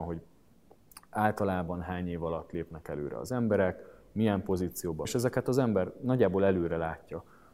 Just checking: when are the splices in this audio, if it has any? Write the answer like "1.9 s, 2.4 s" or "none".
5.1 s